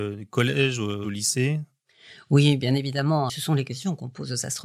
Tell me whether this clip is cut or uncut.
cut